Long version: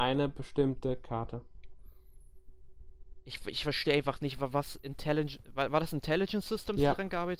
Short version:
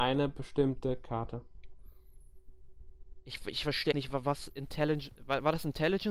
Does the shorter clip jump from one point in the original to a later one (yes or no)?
yes